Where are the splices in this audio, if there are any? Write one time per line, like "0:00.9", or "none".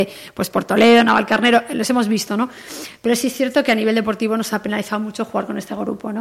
none